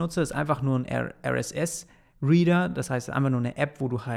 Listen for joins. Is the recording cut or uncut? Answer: uncut